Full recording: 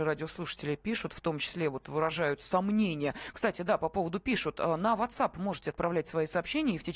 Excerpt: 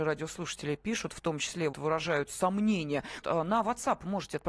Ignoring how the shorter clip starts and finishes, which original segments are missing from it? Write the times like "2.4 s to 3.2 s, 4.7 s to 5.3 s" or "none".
1.7 s to 1.8 s, 3.3 s to 4.5 s